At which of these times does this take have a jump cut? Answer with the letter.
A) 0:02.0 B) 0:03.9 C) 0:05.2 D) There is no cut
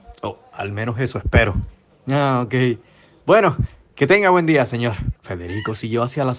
C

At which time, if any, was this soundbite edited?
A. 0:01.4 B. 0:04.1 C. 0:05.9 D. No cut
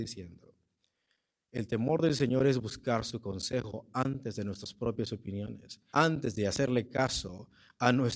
C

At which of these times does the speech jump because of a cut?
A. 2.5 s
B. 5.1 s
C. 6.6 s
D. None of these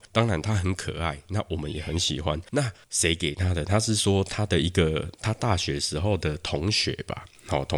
A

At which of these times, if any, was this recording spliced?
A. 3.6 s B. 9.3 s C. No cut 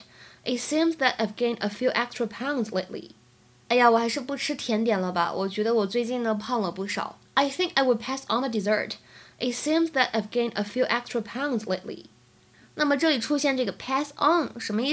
C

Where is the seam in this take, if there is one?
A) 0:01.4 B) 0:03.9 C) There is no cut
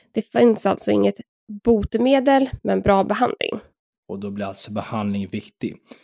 C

